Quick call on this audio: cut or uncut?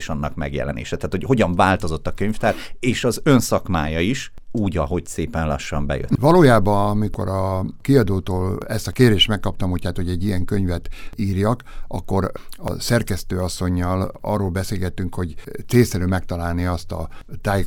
cut